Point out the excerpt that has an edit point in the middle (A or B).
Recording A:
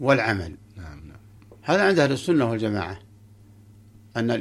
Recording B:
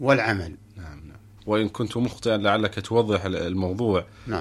B